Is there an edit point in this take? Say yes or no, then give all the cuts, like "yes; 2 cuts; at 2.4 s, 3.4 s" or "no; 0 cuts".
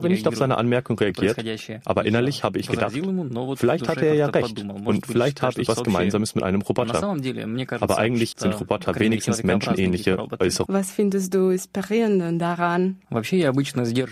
yes; 3 cuts; at 5.7 s, 8.3 s, 10.7 s